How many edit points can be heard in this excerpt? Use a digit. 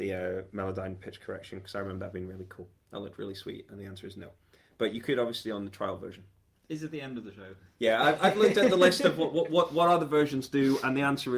1